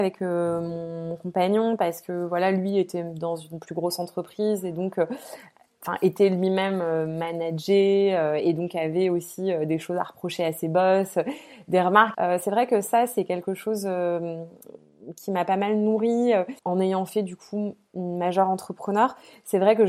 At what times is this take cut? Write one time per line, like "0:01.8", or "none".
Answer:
0:12.1
0:16.6